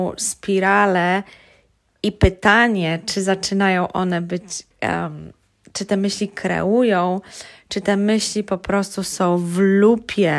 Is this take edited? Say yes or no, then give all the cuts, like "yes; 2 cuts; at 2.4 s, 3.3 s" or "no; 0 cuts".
yes; 1 cut; at 4.7 s